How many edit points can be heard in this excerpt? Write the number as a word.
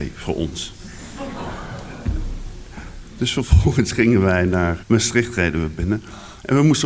one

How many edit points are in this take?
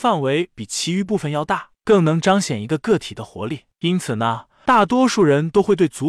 zero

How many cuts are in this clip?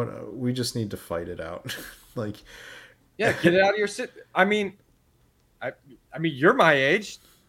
zero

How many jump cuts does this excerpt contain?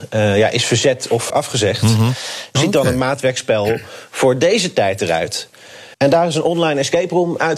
three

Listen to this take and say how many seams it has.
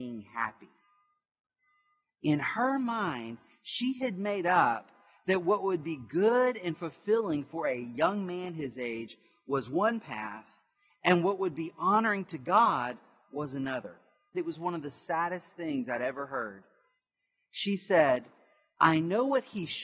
one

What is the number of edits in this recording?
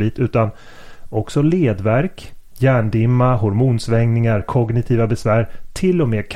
two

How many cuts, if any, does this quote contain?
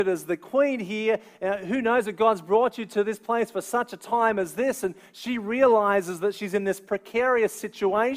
zero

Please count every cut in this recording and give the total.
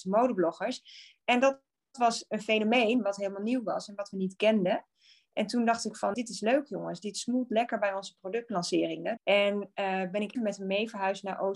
three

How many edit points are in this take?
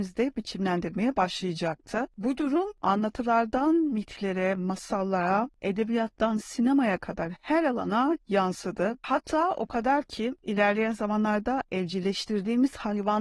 zero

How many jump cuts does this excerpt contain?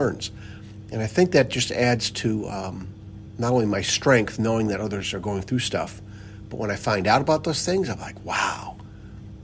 zero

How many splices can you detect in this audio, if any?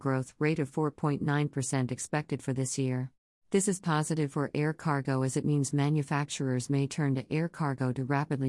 one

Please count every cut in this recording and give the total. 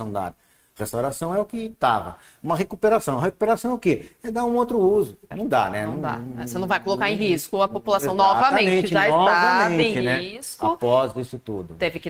one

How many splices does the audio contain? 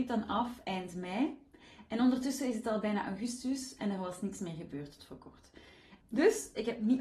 one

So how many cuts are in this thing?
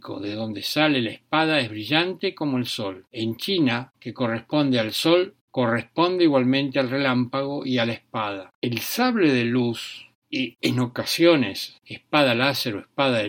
two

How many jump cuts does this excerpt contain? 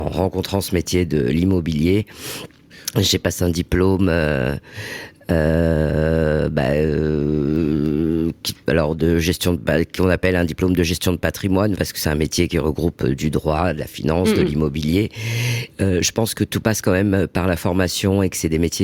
two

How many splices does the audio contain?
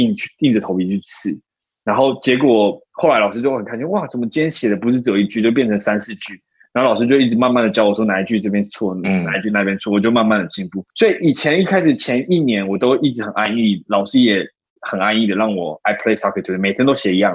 one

